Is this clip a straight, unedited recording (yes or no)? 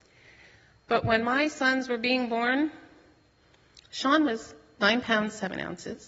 yes